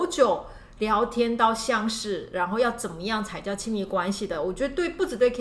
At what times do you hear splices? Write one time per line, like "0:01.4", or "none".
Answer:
none